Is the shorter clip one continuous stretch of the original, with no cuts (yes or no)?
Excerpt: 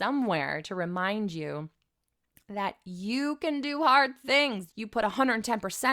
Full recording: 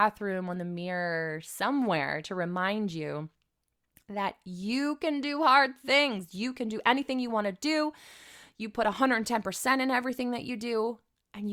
no